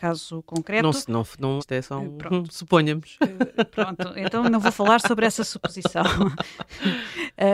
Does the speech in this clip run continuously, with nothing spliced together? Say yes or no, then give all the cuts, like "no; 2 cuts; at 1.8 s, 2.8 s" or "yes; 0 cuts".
no; 1 cut; at 1.6 s